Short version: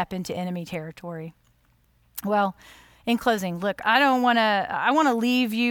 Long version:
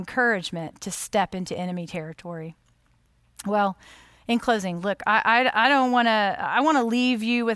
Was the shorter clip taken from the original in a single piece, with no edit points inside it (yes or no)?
no